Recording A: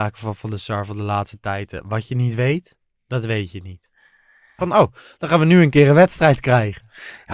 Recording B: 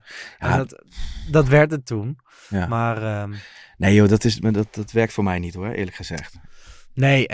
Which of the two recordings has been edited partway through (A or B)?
A